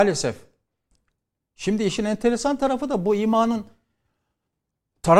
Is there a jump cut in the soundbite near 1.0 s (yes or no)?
no